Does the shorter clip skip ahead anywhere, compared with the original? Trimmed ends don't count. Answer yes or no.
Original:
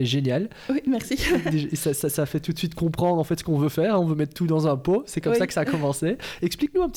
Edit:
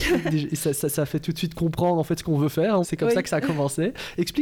yes